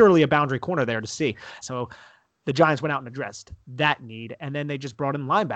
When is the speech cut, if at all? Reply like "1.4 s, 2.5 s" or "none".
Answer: 1.6 s